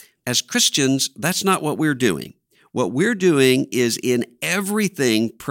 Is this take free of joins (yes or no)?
yes